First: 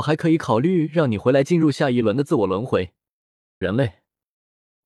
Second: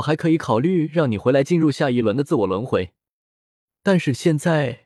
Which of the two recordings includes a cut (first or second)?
first